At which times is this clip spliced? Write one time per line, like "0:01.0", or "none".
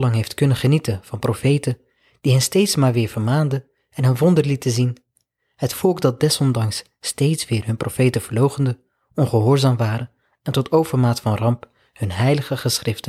none